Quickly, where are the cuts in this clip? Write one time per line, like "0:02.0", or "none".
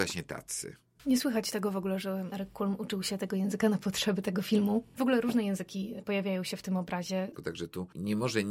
0:07.3